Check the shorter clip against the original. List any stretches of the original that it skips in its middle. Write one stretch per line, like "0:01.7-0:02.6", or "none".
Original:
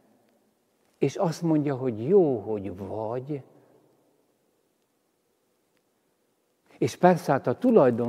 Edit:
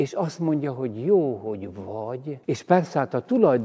0:03.5-0:06.8

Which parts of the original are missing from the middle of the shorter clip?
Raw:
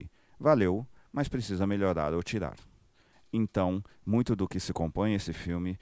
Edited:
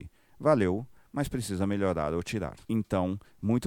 0:02.6-0:03.3

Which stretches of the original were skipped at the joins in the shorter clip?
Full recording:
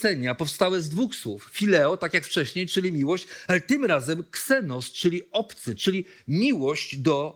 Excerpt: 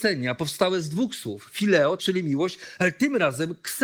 0:02.0-0:02.7

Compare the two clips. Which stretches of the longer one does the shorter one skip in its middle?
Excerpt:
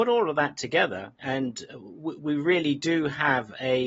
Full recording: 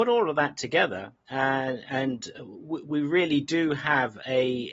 0:01.2-0:01.8

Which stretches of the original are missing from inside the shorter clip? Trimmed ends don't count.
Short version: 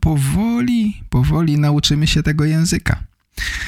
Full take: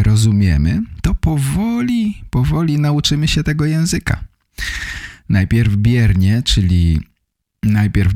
none

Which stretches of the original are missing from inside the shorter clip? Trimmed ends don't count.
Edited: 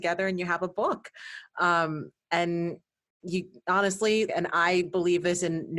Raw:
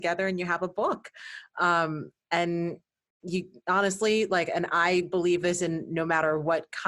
0:04.3-0:04.5

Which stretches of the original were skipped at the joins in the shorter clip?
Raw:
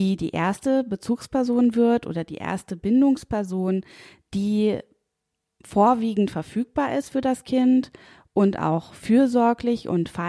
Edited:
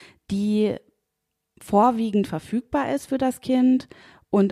none

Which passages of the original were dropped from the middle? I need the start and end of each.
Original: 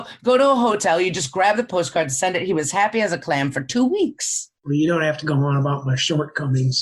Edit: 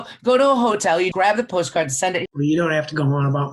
0:01.1-0:01.3
0:02.5-0:04.6

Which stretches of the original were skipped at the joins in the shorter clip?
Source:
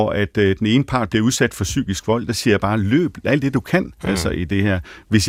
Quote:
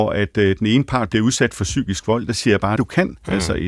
0:02.8-0:03.5

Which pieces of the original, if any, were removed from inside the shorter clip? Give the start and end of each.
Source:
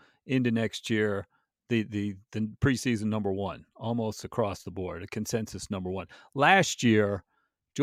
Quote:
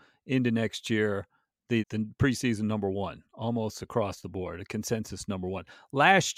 0:01.8-0:02.3

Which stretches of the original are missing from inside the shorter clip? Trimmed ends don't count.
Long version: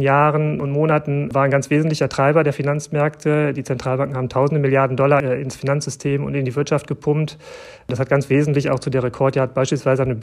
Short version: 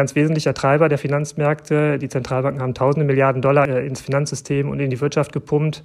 none

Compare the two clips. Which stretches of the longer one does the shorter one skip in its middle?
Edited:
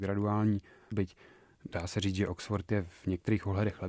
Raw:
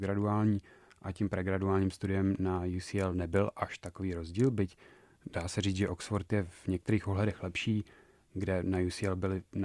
0:00.9-0:04.5

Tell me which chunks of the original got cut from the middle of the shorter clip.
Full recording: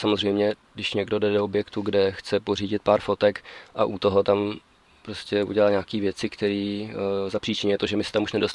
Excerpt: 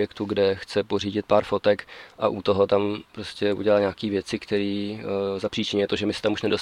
0:04.7-0:05.0

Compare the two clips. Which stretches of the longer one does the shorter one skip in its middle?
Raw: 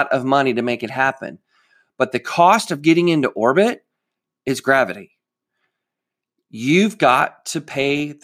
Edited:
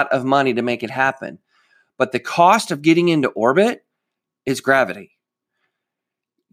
none

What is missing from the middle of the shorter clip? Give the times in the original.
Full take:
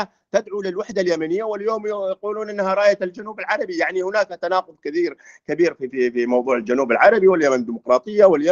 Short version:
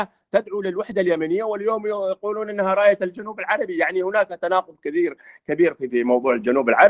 0:05.9-0:06.1

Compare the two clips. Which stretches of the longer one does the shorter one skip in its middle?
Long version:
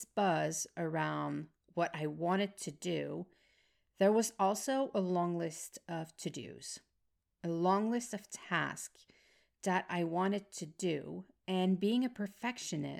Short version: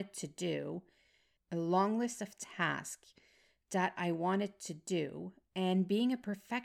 0:03.8-0:07.3

